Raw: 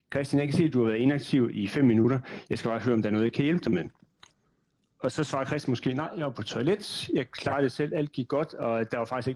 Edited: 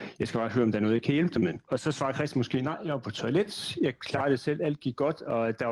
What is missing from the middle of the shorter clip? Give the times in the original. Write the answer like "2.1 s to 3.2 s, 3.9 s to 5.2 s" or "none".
3.9 s to 5.0 s